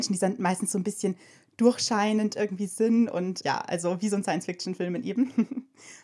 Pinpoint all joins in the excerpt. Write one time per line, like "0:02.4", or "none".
none